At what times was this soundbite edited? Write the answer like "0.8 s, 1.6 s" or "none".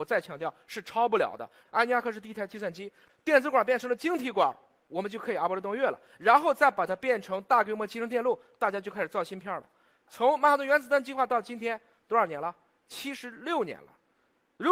1.7 s, 3.1 s